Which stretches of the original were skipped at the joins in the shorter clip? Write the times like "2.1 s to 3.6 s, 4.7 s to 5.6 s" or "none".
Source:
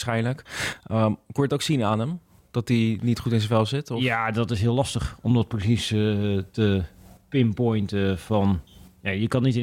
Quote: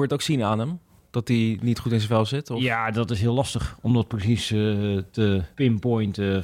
6.9 s to 7.3 s